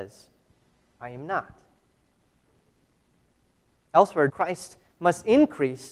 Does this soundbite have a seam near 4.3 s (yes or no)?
yes